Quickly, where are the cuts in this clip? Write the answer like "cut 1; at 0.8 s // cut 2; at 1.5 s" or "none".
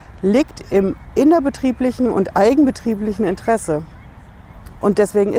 none

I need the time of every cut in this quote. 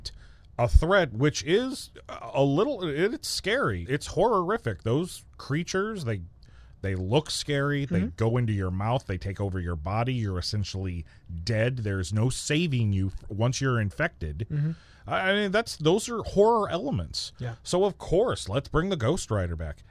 cut 1; at 3.9 s

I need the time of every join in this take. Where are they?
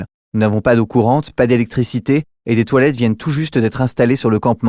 none

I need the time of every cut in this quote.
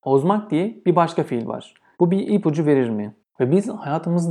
cut 1; at 1.9 s // cut 2; at 3.2 s

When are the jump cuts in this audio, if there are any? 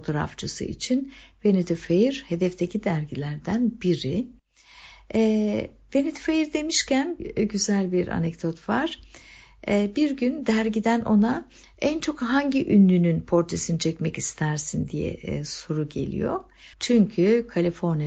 cut 1; at 16.7 s

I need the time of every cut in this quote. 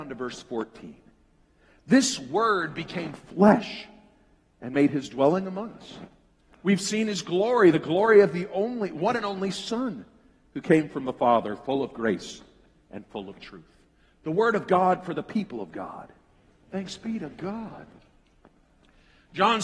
none

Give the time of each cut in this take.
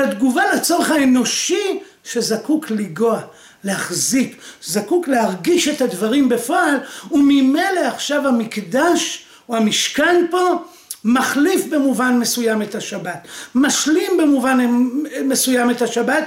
none

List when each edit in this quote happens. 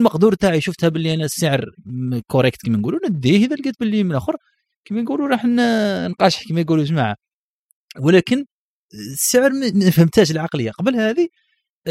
none

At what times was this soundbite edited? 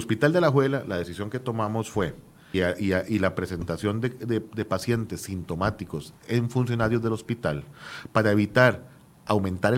cut 1; at 2.5 s

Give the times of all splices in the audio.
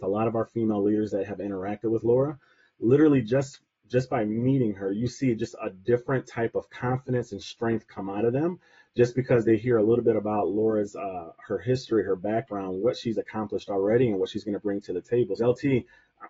cut 1; at 15.4 s

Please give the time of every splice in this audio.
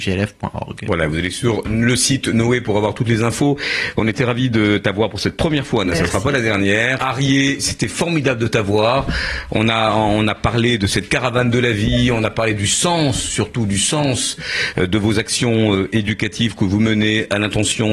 cut 1; at 7.0 s

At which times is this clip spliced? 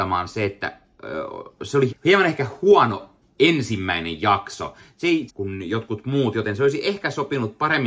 cut 1; at 1.9 s // cut 2; at 5.3 s

